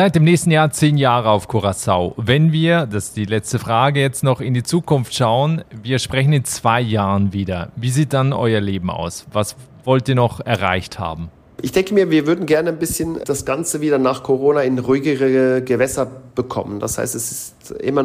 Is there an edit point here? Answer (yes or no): no